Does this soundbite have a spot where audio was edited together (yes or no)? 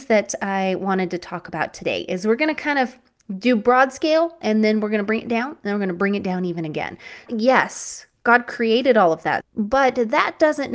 yes